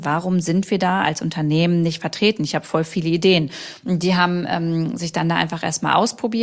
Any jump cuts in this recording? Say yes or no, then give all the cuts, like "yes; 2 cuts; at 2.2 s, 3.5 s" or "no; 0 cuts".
no; 0 cuts